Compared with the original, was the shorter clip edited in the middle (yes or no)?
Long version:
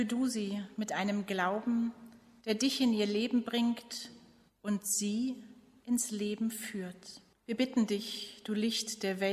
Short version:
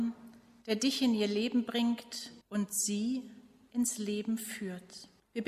yes